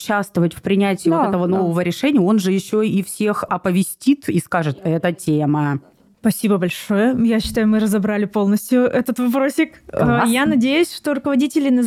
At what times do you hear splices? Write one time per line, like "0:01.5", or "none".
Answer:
none